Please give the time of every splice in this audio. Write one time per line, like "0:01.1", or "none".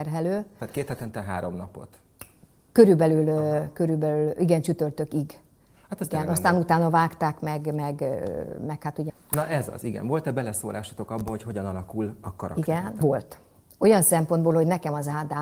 0:09.1
0:13.0